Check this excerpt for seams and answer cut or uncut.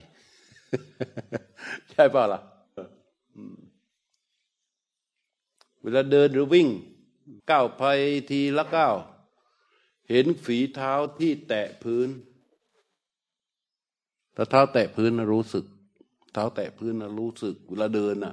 cut